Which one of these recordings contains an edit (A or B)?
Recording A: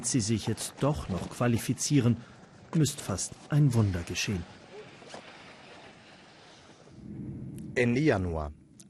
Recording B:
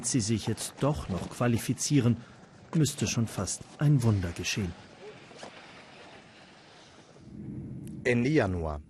A